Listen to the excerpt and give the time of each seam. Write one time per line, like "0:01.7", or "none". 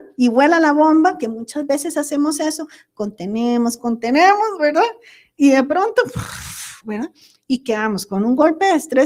0:03.8